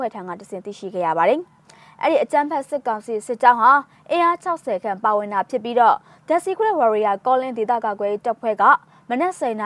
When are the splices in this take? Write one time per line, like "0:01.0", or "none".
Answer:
none